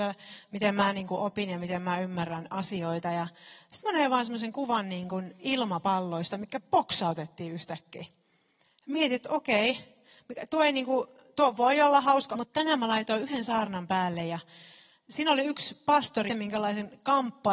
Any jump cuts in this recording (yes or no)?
yes